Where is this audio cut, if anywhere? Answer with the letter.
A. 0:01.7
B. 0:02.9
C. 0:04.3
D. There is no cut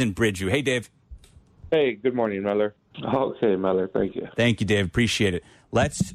B